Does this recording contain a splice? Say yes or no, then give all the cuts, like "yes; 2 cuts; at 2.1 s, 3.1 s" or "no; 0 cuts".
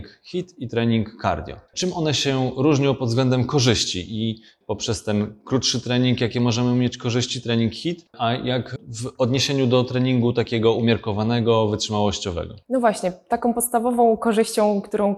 no; 0 cuts